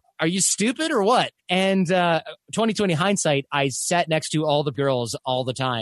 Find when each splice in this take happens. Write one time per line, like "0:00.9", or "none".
0:01.4
0:04.7